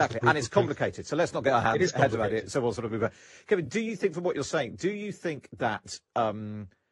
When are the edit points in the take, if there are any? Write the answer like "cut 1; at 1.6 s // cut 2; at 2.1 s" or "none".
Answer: none